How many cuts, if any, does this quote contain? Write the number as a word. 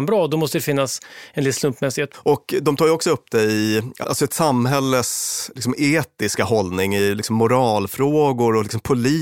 two